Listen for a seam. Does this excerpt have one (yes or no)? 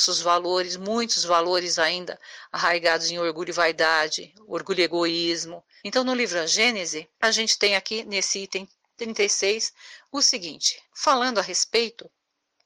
yes